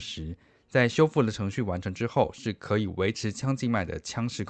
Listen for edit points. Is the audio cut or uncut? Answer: uncut